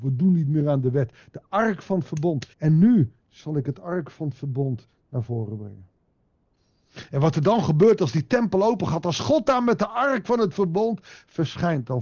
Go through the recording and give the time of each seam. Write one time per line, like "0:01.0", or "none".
0:02.5